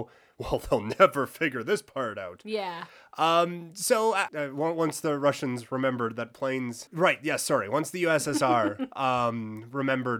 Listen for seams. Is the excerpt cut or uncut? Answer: cut